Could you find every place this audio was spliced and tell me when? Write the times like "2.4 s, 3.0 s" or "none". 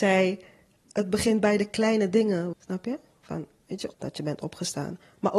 2.5 s, 3.9 s